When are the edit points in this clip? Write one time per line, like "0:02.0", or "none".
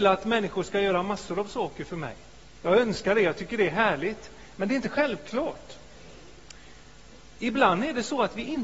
none